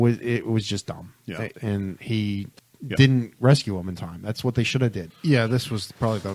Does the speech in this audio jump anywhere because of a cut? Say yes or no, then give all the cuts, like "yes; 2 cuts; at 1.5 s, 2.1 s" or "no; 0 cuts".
yes; 2 cuts; at 1.5 s, 5.1 s